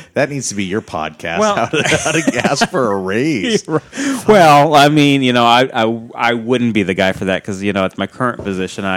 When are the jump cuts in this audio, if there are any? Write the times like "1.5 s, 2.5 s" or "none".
none